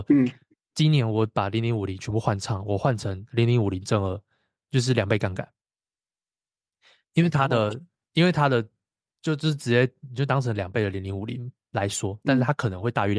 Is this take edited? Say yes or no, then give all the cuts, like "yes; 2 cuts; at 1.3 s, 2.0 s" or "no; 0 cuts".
no; 0 cuts